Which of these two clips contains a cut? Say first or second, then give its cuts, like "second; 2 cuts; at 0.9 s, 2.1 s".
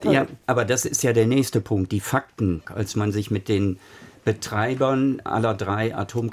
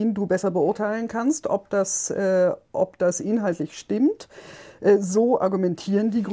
first; 1 cut; at 2.6 s